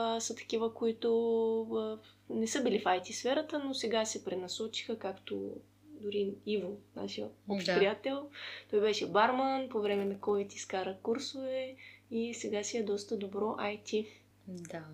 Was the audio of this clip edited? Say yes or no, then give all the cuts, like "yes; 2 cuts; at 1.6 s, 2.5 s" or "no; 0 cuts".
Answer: no; 0 cuts